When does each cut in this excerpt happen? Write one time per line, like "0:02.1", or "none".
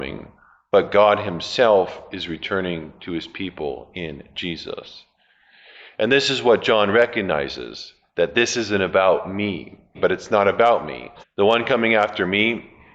0:09.9
0:11.2